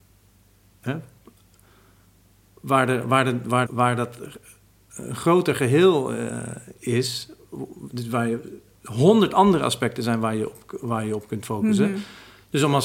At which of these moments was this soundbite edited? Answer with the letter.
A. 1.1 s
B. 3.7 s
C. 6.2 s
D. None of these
B